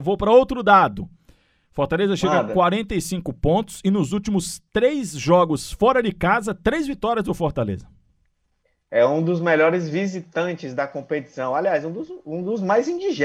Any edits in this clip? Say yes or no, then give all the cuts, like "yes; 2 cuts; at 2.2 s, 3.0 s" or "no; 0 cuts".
no; 0 cuts